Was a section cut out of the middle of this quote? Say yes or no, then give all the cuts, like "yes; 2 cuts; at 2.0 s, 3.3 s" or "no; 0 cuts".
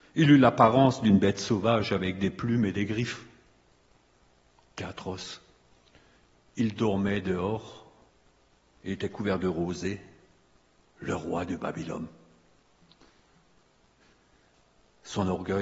no; 0 cuts